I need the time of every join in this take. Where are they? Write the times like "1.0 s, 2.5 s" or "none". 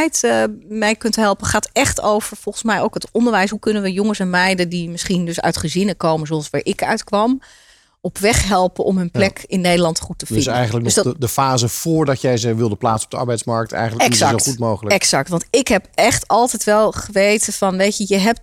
none